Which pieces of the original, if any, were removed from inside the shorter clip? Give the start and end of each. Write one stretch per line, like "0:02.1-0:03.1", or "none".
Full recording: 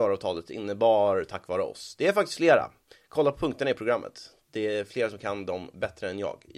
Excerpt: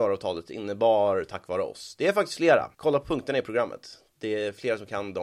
0:02.7-0:03.1